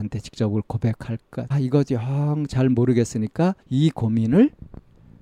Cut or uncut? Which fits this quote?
cut